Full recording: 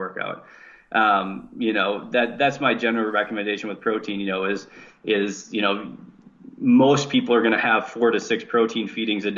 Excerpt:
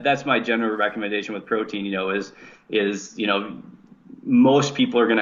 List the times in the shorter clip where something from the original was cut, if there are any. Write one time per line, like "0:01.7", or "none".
none